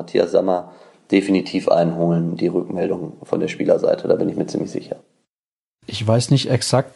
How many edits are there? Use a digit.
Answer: 0